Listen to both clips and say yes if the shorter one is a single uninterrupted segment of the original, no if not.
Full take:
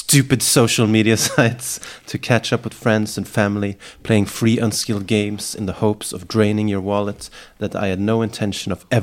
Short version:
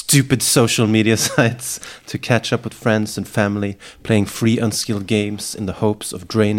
yes